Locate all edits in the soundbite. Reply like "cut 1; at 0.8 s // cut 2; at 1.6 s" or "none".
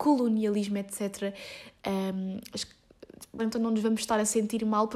cut 1; at 1.8 s // cut 2; at 3.4 s

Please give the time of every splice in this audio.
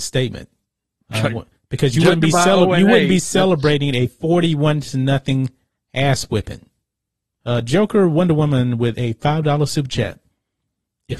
cut 1; at 1.0 s // cut 2; at 7.4 s

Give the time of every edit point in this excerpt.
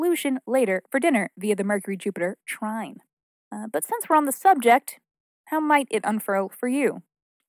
cut 1; at 3.3 s

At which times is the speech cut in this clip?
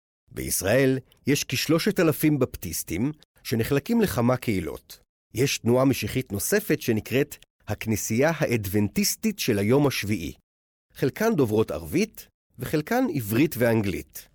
cut 1; at 5.3 s // cut 2; at 10.9 s

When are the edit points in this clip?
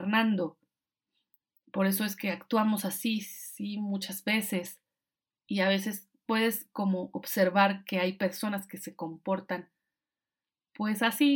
cut 1; at 5.3 s

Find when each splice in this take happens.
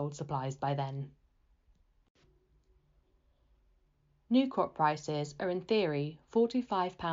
none

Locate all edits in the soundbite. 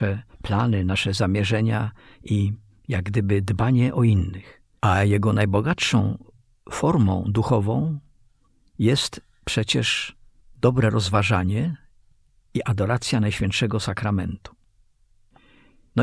cut 1; at 4.8 s

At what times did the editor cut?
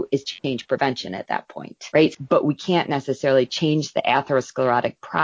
cut 1; at 2.1 s

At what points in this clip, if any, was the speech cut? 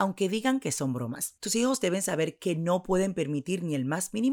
cut 1; at 1.4 s

